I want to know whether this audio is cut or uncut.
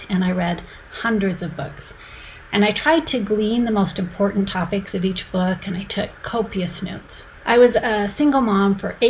uncut